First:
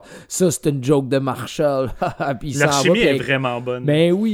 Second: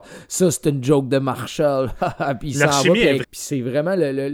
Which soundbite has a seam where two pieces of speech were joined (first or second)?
second